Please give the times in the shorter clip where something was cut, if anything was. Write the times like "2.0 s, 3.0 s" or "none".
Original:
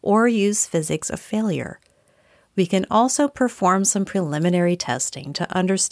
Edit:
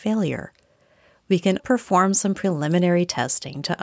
1.6 s